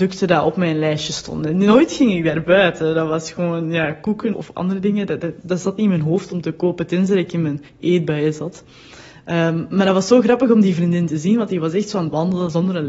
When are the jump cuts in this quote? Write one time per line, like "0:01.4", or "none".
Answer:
0:04.3
0:05.4